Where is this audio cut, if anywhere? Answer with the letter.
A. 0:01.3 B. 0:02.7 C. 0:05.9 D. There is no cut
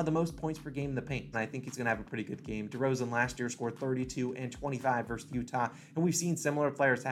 A